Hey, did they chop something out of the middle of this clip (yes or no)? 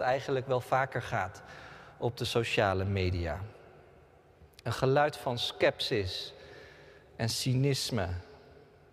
no